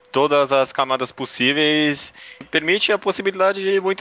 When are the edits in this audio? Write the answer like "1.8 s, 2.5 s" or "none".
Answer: 2.4 s